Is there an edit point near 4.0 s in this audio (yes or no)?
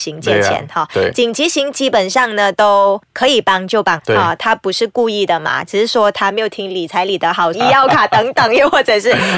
yes